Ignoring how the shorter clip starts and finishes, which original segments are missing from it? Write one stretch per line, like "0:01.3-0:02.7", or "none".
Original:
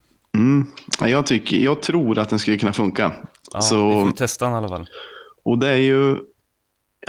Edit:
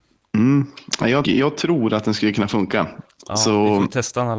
0:01.2-0:01.5

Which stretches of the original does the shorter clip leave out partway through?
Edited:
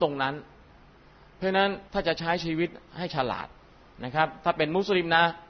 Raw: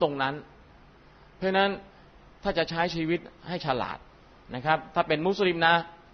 0:01.9-0:02.4

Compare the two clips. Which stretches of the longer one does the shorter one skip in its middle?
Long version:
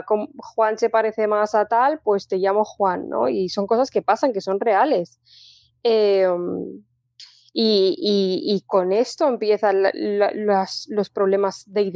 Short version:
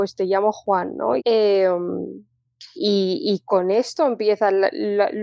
0:03.3-0:05.8
0:07.3-0:08.0

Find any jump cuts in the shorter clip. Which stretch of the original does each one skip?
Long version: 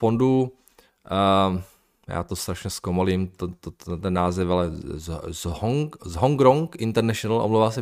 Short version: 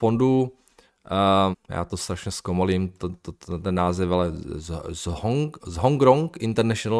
0:01.5-0:01.9

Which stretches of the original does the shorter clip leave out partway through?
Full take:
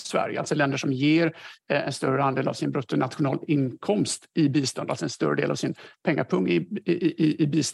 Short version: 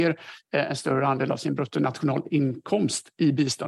none

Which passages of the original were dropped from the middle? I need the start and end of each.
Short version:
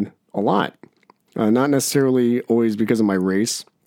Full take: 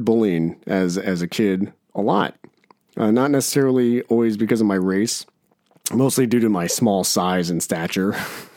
none

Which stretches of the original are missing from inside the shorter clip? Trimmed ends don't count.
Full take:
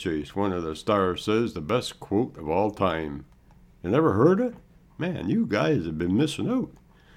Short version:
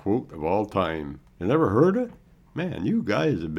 0:03.4-0:03.7

